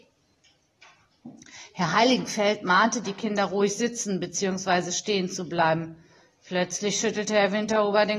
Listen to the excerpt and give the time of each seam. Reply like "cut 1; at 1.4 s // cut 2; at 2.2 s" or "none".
none